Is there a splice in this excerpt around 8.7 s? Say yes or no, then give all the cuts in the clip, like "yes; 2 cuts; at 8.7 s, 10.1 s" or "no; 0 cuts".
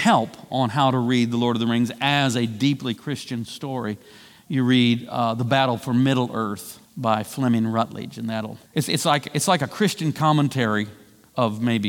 yes; 2 cuts; at 6.9 s, 8.7 s